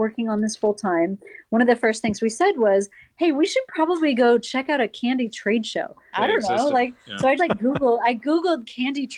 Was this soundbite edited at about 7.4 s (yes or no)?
yes